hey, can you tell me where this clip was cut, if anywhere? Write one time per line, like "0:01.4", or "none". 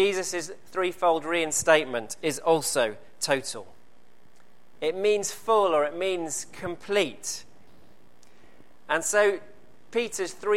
0:04.8